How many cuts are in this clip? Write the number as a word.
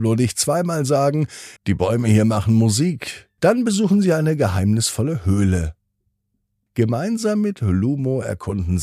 three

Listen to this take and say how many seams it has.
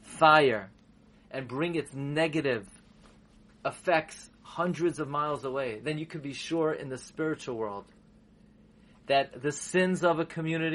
zero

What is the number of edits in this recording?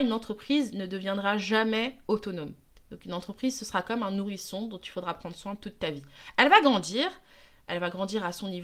zero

